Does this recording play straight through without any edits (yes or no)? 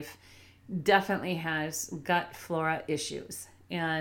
yes